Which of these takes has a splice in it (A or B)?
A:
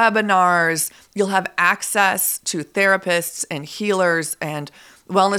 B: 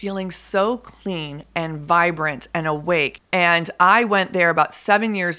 B